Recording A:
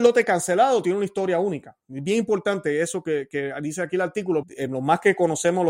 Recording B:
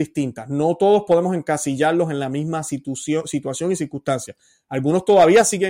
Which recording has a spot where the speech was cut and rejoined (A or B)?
A